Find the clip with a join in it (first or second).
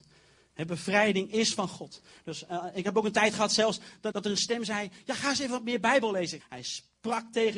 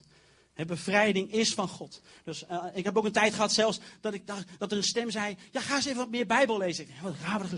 first